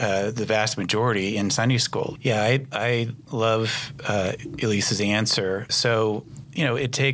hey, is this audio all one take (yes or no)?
no